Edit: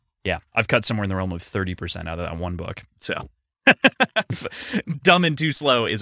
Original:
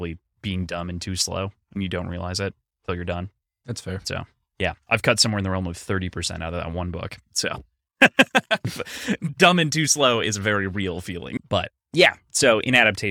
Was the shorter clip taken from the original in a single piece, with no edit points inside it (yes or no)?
yes